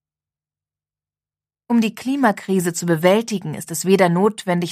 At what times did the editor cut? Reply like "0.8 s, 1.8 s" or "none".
1.5 s